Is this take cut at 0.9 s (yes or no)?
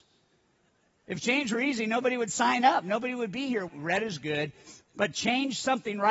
no